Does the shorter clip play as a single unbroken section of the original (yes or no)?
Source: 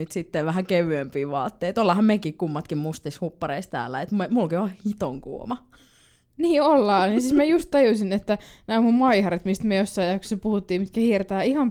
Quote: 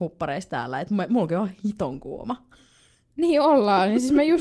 yes